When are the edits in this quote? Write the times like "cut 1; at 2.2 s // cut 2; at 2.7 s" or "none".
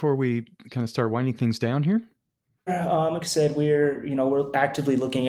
cut 1; at 2.7 s